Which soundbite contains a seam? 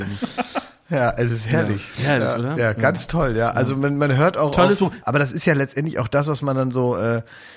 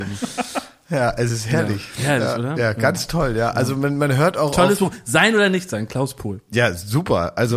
first; 1 cut; at 5.0 s

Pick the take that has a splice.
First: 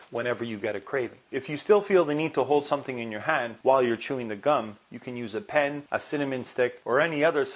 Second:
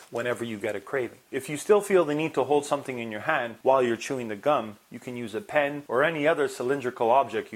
second; 1 cut; at 5.9 s

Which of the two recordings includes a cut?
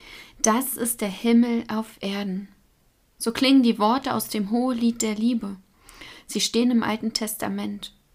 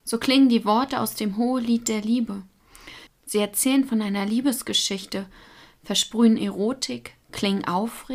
second; 1 cut; at 3.1 s

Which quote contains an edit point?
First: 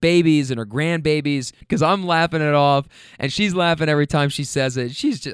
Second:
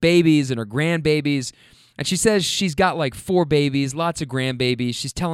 first; 1 cut; at 1.6 s

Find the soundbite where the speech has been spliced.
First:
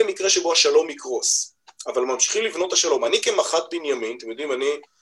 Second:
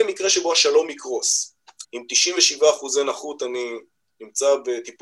second; 1 cut; at 1.8 s

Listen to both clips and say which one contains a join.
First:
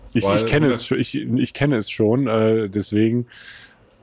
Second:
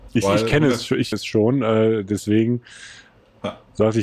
second; 1 cut; at 1.1 s

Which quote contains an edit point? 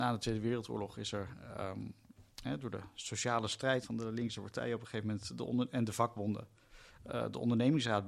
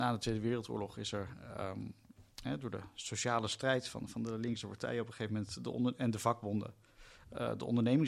first; 1 cut; at 3.8 s

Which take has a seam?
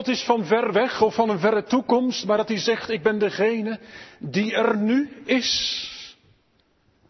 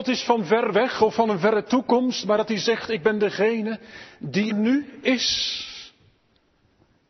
second; 1 cut; at 4.5 s

